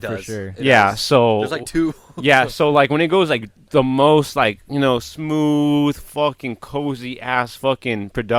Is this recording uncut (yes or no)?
yes